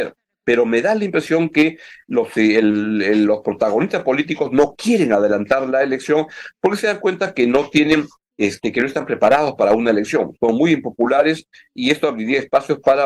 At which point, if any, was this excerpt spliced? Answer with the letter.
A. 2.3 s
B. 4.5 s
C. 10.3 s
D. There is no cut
D